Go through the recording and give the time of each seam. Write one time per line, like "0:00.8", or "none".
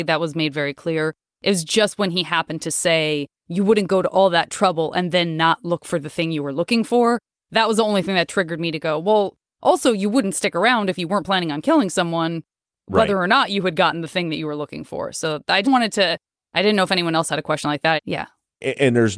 0:15.6
0:18.0